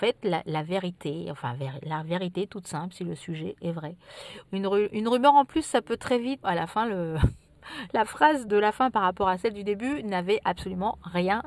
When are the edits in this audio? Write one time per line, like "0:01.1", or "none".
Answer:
0:04.5
0:06.4
0:08.5